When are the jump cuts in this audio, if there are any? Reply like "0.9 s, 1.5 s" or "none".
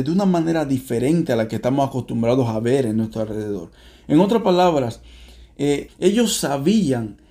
5.9 s